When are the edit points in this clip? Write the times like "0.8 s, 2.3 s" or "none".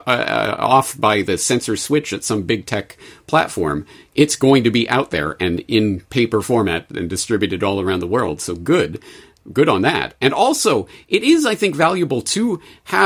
none